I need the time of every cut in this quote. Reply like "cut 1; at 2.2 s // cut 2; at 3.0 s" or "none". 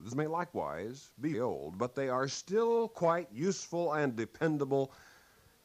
cut 1; at 1.3 s